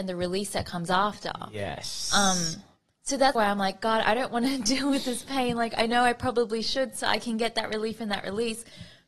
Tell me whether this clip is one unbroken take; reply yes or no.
no